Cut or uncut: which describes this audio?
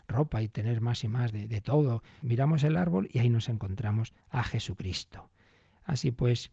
cut